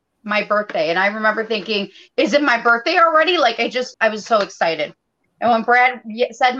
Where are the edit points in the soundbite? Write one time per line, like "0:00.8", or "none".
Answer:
0:03.9